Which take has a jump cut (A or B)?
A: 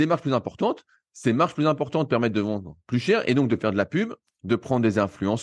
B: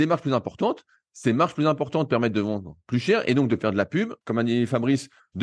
B